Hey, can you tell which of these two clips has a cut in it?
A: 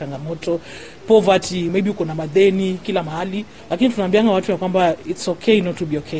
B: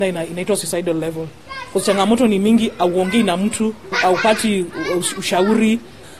A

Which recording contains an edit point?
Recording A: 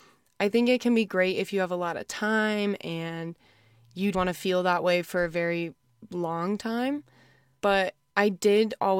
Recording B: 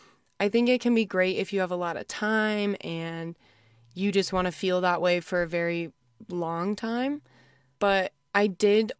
A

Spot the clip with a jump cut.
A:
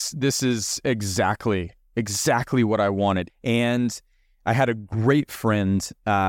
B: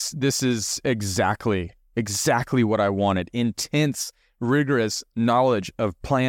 A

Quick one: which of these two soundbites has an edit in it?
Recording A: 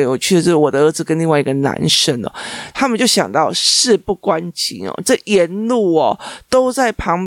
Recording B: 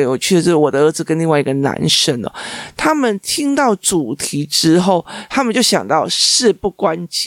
A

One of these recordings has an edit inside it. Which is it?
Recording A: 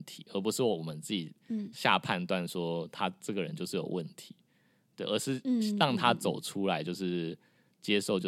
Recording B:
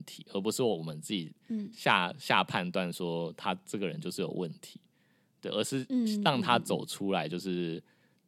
A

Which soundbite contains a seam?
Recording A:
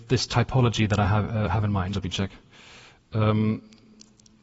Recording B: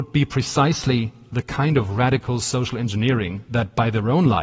A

